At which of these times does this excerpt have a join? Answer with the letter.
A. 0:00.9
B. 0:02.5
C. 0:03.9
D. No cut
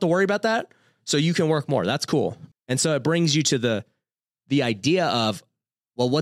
B